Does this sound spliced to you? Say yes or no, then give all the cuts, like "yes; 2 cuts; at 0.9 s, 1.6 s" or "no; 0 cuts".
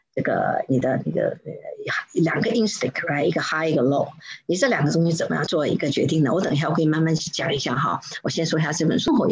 yes; 1 cut; at 5.5 s